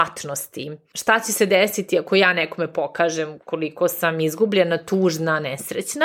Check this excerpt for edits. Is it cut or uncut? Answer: uncut